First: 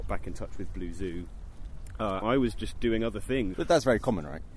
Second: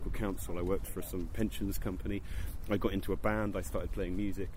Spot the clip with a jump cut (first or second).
first